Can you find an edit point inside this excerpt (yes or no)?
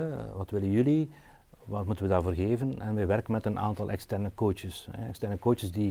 no